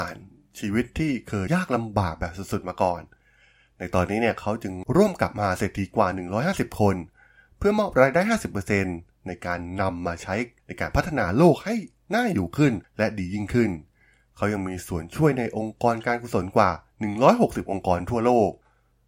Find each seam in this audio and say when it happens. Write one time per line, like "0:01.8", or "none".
0:01.5

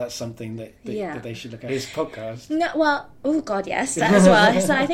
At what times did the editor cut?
0:01.7

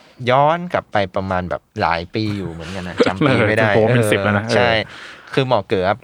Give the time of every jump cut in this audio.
0:01.7

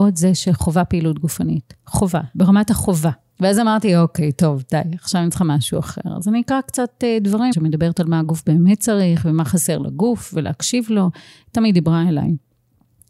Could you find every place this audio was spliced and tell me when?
0:03.3
0:07.5

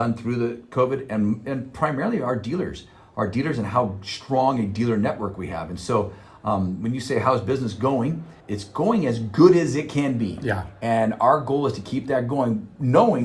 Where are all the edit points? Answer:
0:08.4

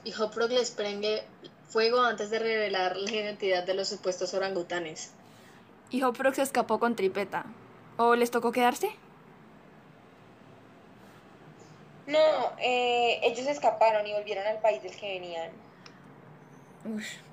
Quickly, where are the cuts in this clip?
none

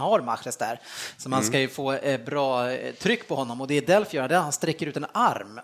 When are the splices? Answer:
none

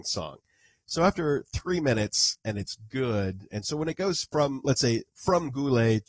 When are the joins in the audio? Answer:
0:02.4

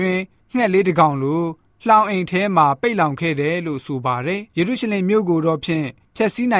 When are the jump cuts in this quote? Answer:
0:04.5

